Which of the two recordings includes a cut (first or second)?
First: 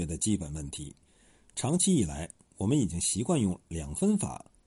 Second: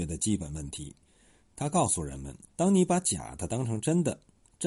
second